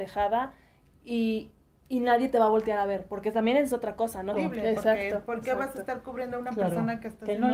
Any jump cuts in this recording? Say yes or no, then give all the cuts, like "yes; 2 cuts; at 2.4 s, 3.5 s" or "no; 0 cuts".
yes; 1 cut; at 4.3 s